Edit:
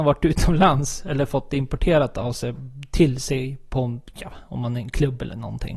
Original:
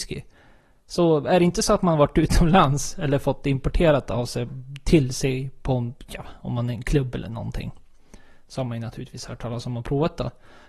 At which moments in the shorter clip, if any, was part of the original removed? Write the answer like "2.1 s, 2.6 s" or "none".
none